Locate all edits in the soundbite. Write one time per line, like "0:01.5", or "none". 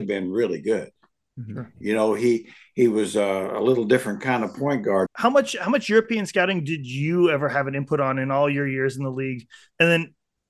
0:05.1

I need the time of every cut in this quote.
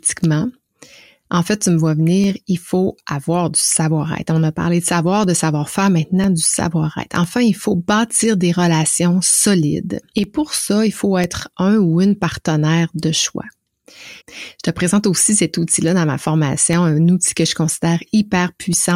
0:10.1
0:14.2

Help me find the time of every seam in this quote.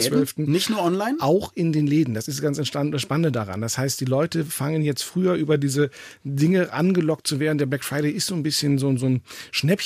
none

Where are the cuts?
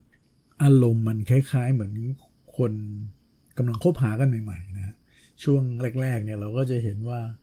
none

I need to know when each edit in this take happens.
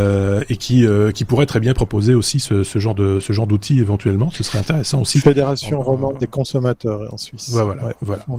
none

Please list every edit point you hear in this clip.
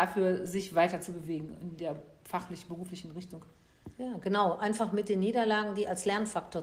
none

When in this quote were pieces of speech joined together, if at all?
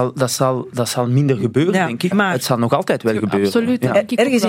0:02.1

